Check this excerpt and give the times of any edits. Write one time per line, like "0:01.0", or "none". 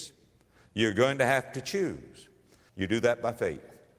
0:02.7